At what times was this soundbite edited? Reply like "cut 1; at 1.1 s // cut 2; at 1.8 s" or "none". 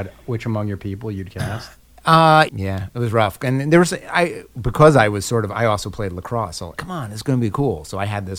cut 1; at 2.5 s // cut 2; at 6.8 s